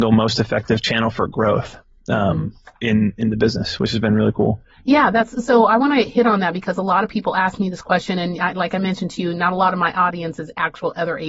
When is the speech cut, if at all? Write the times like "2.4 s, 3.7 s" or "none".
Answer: none

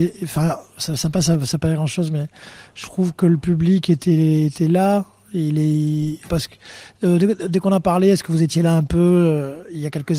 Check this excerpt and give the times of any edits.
6.3 s

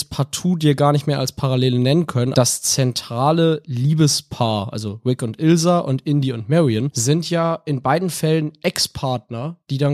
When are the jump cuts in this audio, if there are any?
2.3 s

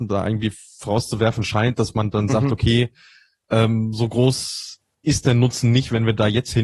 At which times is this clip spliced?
none

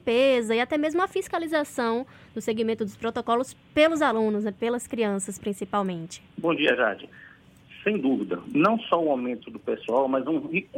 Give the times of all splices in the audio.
6.3 s

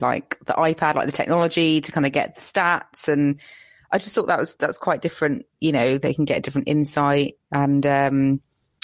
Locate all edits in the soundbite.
none

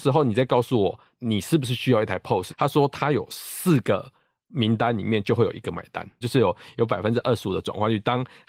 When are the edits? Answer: 2.5 s, 6.2 s

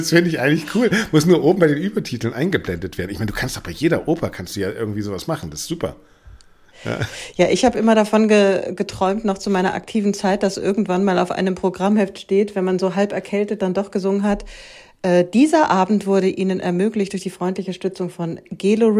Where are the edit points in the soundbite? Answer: none

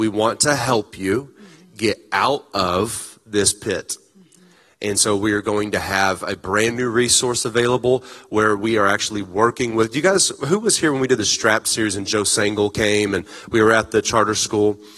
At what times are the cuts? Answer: none

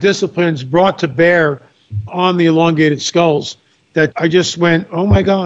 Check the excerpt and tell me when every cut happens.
2.1 s, 4.1 s

